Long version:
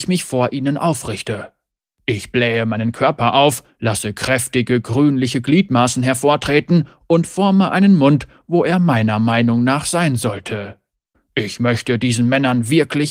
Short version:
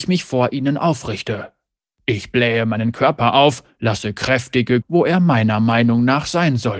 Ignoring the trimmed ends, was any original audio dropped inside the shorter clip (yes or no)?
yes